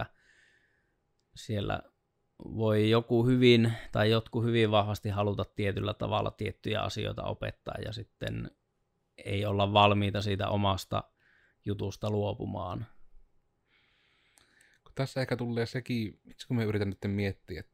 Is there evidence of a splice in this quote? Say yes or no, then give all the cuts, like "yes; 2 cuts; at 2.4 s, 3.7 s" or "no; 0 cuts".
no; 0 cuts